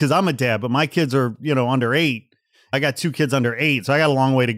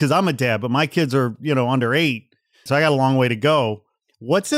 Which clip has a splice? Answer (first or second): second